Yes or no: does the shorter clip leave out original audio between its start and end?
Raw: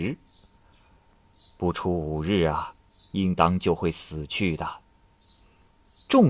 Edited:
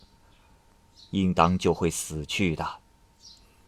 yes